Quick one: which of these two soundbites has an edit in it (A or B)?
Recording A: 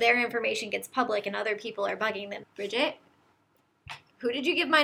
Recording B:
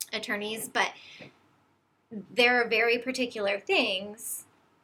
A